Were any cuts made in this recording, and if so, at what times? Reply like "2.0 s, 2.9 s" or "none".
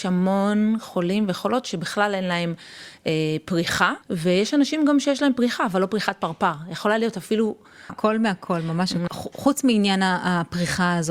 4.0 s, 7.9 s, 9.1 s